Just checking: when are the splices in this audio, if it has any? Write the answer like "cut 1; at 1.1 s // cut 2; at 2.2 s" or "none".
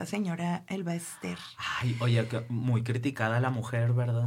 none